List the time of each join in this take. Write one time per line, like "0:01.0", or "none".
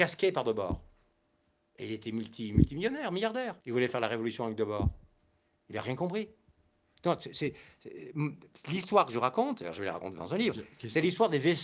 0:03.6